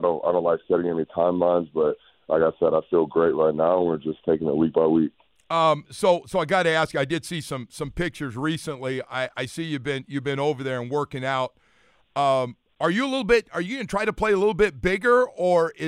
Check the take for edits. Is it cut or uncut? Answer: uncut